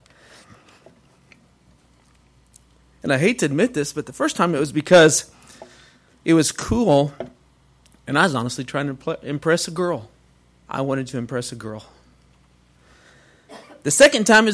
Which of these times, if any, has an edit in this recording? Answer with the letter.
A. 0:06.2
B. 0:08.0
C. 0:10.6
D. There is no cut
C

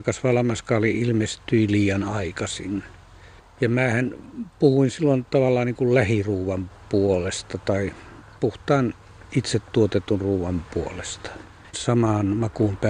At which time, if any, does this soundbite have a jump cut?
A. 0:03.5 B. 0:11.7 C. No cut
B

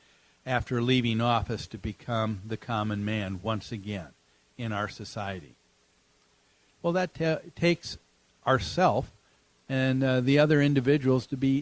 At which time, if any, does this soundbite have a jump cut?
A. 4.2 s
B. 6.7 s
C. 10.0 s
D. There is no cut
B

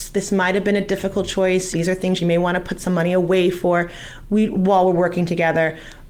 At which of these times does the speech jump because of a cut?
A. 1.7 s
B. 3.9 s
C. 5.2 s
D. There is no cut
A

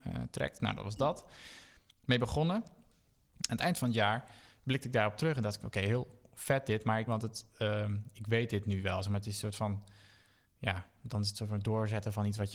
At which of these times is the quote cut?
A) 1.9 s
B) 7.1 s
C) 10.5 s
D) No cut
B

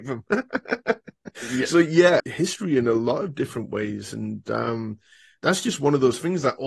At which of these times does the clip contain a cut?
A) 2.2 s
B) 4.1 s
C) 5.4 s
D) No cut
A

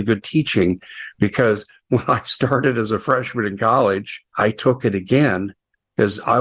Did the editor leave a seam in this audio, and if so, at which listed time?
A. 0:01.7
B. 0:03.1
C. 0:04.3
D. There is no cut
C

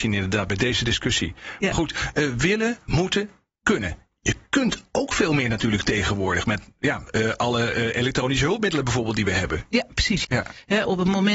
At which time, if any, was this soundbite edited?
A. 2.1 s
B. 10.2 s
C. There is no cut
B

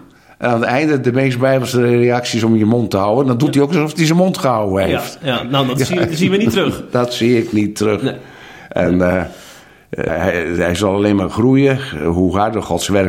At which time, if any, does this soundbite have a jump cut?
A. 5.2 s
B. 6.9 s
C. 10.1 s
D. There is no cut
C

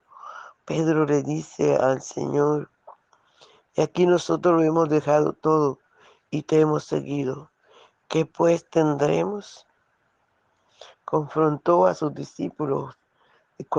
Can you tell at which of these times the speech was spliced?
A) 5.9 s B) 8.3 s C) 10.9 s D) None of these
C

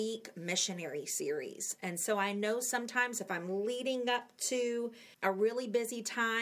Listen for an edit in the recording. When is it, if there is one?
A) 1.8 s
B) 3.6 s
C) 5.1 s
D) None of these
C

